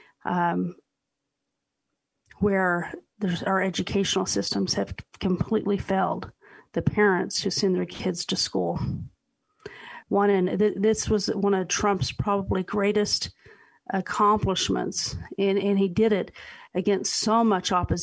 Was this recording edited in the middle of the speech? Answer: yes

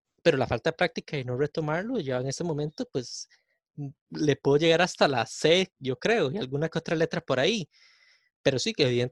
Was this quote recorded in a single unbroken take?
yes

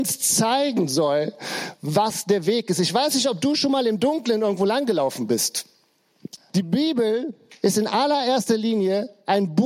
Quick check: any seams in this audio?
yes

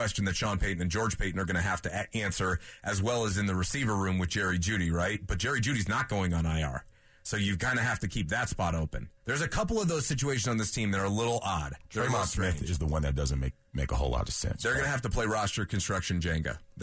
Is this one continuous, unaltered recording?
no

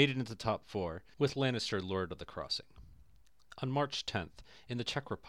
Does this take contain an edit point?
no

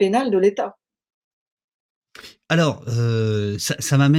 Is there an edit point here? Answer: no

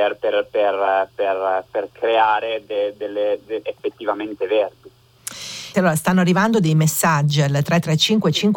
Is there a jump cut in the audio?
yes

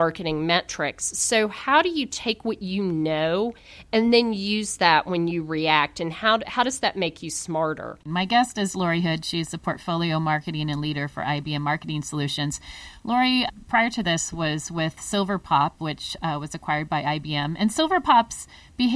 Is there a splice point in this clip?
yes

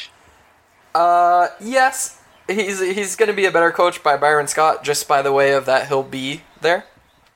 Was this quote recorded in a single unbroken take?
yes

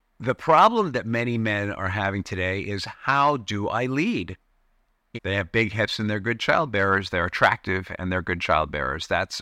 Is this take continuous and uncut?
no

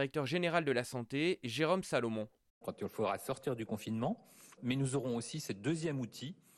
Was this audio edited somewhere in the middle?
yes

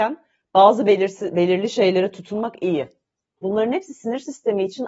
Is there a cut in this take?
yes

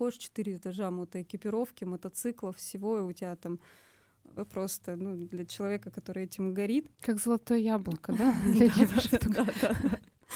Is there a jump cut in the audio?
yes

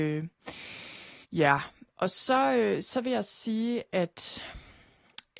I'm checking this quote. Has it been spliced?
yes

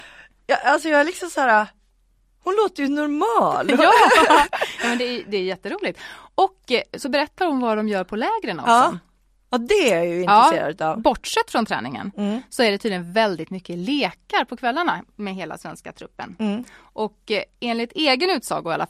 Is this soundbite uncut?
yes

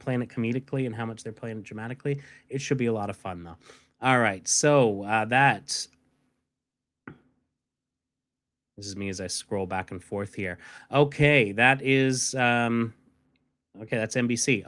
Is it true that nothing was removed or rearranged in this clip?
yes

